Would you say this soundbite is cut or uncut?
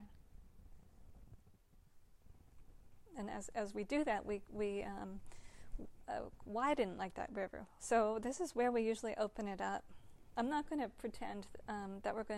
cut